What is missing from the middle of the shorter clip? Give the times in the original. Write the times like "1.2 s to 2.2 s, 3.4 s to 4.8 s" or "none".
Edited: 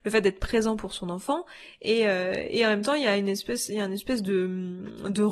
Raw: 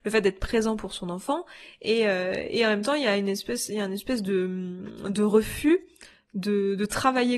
none